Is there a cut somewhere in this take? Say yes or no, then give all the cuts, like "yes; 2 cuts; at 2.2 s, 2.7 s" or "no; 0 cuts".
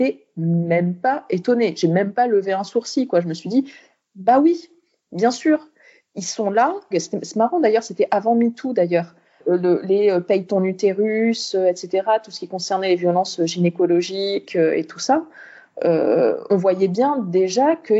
yes; 2 cuts; at 6.9 s, 16.5 s